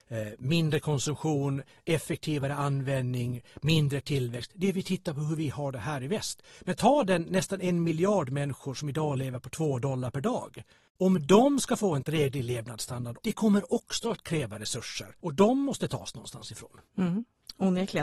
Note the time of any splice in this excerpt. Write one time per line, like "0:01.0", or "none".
0:06.6